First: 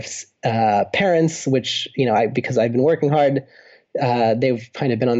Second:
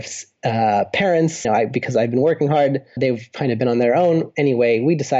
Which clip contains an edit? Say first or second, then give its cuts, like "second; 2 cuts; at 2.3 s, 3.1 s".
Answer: second; 2 cuts; at 1.4 s, 3.0 s